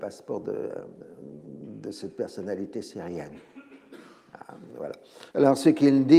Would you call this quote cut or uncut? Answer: cut